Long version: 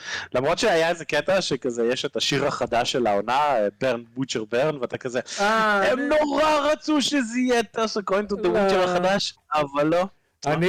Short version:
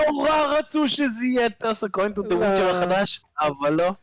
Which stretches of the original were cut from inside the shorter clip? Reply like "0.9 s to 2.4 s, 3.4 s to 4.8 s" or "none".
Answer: none

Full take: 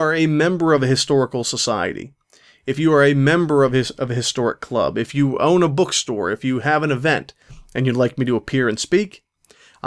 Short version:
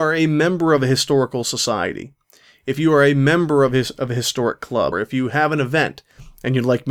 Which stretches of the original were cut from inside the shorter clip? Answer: 4.9 s to 6.2 s

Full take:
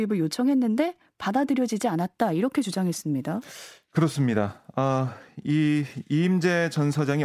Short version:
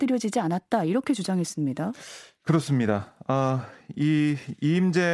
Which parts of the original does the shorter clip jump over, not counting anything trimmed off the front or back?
none

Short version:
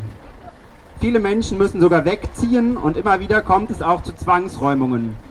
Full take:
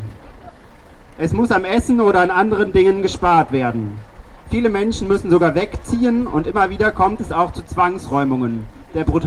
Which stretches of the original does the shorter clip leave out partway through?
0.9 s to 4.4 s

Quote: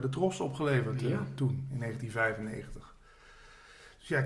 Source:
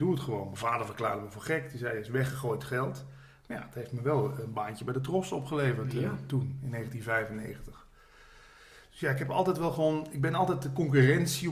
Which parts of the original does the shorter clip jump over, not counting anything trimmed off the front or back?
none

